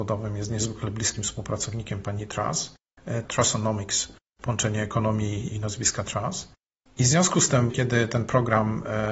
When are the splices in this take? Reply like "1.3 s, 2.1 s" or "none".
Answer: 3.2 s, 5.5 s, 7.7 s